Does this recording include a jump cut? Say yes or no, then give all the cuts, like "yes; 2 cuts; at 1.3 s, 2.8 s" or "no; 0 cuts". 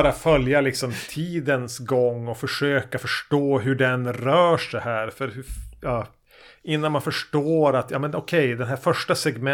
no; 0 cuts